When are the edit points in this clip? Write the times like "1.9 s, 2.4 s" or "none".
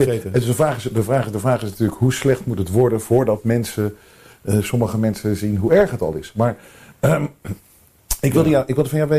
none